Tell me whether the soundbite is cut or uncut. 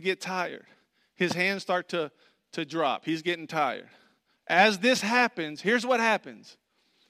cut